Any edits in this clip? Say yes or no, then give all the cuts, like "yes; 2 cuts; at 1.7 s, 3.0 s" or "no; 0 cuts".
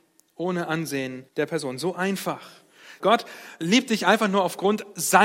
yes; 2 cuts; at 1.3 s, 3.0 s